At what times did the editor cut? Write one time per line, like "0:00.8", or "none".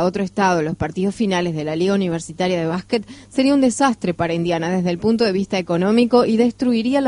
none